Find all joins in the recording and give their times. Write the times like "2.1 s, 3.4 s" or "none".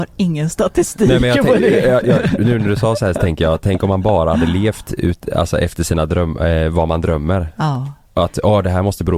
none